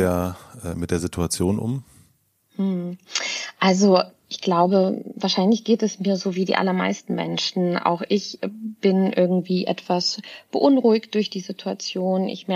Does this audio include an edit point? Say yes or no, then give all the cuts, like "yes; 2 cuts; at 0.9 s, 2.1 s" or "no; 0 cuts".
no; 0 cuts